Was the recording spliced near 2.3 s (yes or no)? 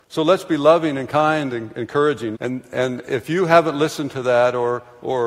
yes